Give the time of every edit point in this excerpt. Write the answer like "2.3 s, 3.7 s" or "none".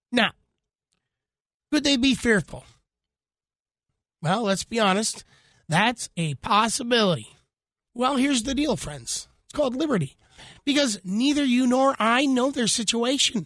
7.9 s